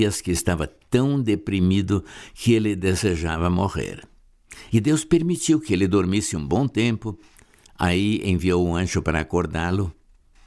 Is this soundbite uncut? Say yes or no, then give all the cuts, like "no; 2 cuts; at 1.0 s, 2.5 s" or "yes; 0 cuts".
no; 1 cut; at 4.7 s